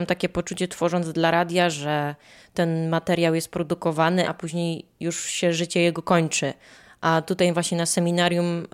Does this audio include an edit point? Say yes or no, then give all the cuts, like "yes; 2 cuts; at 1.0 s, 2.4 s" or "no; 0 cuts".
yes; 1 cut; at 4.2 s